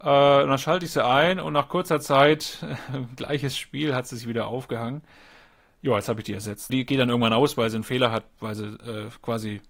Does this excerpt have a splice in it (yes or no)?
yes